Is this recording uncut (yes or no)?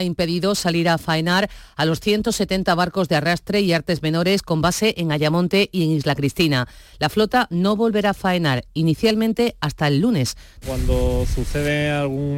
no